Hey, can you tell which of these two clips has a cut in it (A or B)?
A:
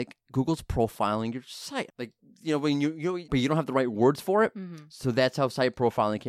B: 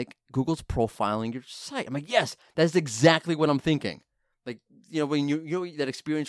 A